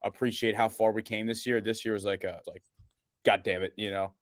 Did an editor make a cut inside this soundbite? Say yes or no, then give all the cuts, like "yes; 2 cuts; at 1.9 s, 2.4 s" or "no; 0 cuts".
yes; 1 cut; at 2.4 s